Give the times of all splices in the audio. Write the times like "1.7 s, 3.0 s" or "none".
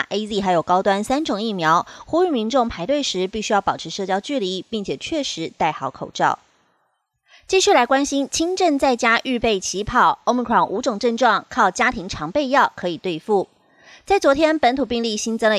none

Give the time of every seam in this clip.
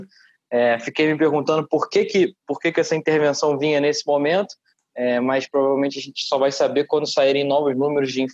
none

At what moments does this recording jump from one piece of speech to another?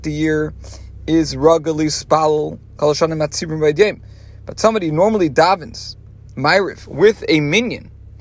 none

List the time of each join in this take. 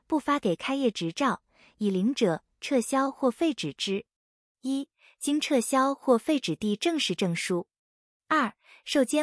none

